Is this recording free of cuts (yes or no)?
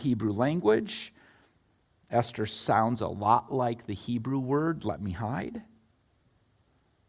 yes